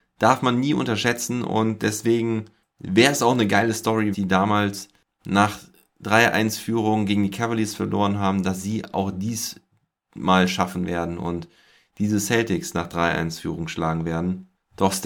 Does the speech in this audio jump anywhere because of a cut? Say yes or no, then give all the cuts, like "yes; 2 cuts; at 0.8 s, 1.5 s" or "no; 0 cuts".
yes; 1 cut; at 4.1 s